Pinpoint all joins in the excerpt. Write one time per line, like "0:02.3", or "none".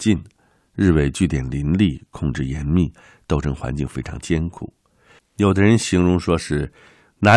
0:05.2

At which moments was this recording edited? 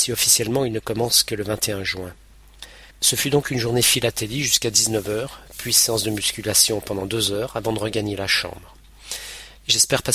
0:02.9

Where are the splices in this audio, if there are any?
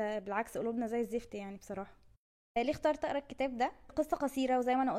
none

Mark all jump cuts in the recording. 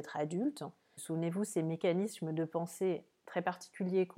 0:01.0

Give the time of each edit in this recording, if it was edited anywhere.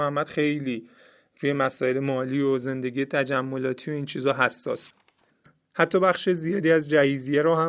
none

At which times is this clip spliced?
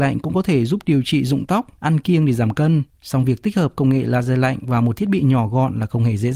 0:01.8
0:02.9

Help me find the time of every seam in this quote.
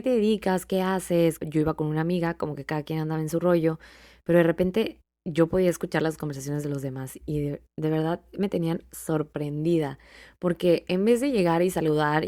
0:01.4

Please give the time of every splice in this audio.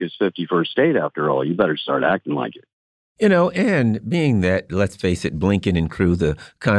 none

